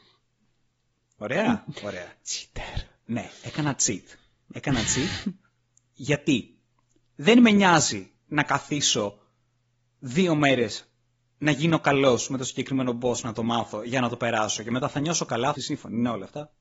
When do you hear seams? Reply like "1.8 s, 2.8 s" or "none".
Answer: 15.5 s

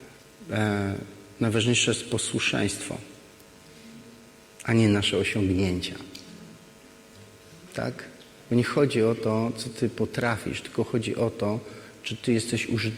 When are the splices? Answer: none

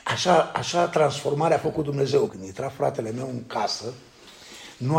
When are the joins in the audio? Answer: 2.3 s

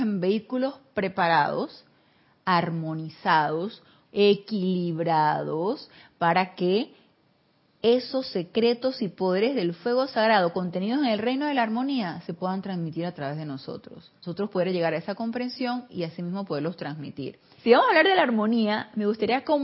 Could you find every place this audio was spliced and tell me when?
4.1 s, 14.2 s, 17.6 s

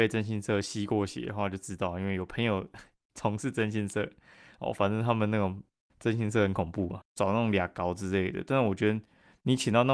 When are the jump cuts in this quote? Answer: 7.0 s

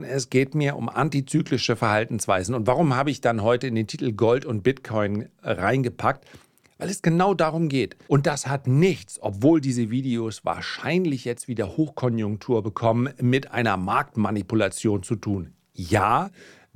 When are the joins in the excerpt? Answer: 8.1 s

